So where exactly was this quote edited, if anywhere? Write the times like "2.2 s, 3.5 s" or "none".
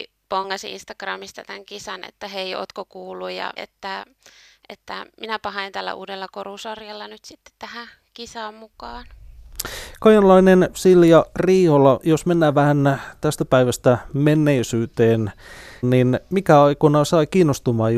3.6 s, 15.8 s